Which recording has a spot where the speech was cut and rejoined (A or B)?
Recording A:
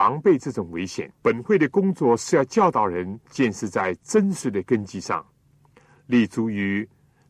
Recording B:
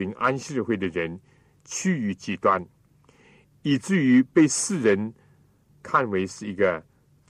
A